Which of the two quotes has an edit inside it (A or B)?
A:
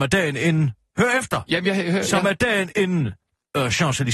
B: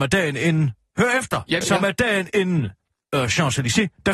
B